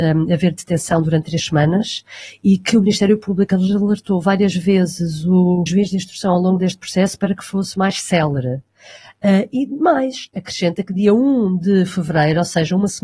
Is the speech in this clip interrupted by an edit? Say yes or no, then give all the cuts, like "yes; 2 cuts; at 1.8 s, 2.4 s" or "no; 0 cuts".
yes; 1 cut; at 5.7 s